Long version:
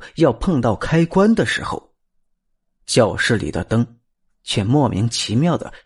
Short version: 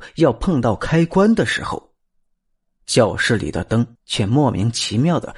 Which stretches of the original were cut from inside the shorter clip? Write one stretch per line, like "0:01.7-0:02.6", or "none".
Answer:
0:04.0-0:04.3